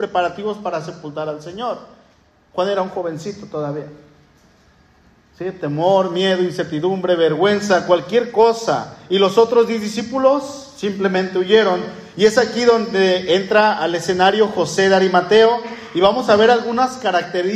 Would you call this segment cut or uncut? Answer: uncut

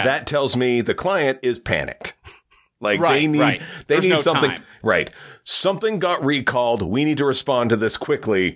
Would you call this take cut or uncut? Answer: uncut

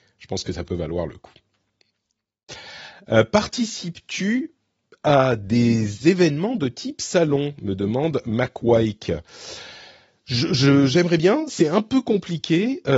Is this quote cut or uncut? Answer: uncut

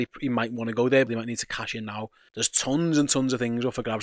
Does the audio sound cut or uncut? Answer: cut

